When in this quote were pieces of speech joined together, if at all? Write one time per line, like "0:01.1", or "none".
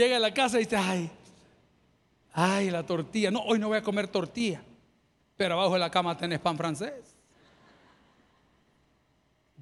none

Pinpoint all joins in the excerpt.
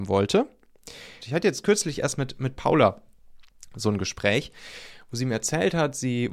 0:01.2

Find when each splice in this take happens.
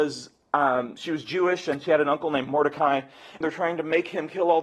0:03.4

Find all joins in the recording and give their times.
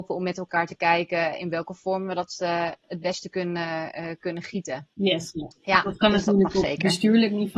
0:04.9

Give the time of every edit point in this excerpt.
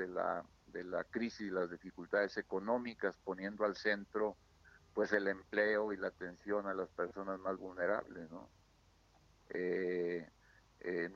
0:09.4

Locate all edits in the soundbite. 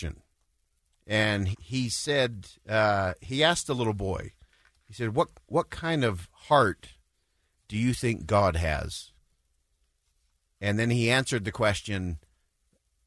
0:01.5

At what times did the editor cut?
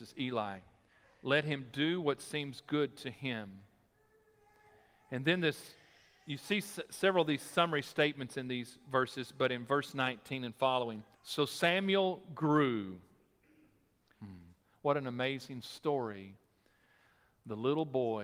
0:11.1
0:14.1

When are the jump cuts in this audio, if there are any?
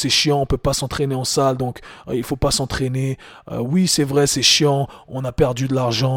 none

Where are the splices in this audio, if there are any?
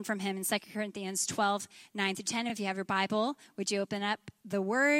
none

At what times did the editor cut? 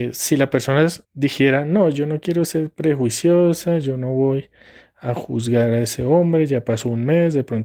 0:01.0

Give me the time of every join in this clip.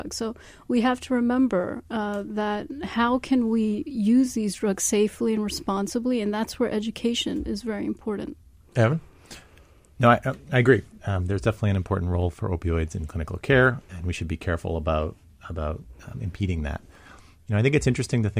none

